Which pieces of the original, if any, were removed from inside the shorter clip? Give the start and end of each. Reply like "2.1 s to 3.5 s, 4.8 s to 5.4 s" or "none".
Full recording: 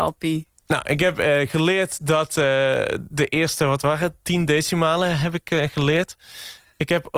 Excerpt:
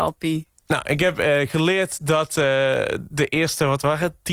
none